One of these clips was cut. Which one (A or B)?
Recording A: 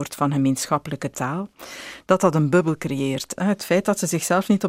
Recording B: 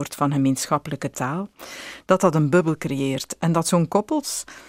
A